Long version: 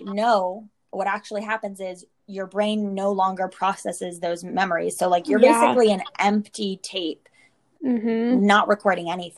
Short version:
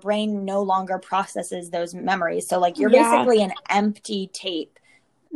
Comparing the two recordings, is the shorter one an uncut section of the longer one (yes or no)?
yes